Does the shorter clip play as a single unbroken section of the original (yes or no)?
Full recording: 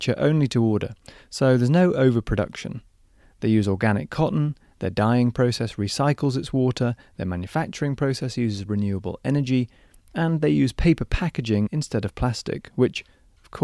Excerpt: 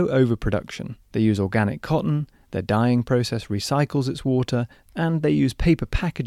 no